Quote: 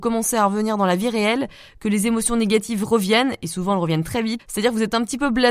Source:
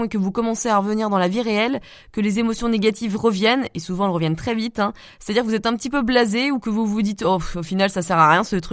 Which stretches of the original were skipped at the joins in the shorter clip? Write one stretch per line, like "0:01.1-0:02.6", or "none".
0:04.7-0:05.1